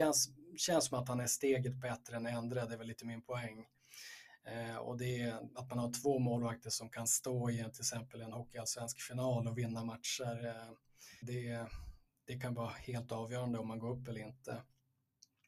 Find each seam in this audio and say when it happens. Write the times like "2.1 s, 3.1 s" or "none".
5.5 s, 11.2 s